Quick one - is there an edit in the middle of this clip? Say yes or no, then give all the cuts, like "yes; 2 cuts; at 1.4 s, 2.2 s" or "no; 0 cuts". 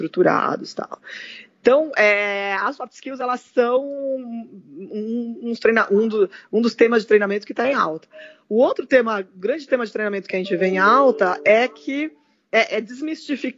no; 0 cuts